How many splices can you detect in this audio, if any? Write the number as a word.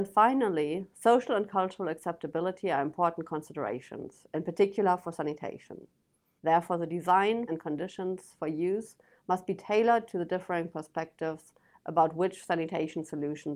two